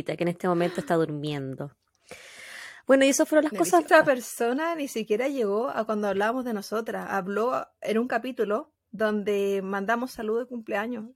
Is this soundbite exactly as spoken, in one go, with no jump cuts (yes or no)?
no